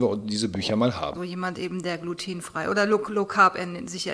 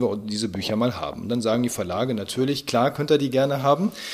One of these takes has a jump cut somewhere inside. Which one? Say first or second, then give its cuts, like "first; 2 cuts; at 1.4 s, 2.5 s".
first; 1 cut; at 1.1 s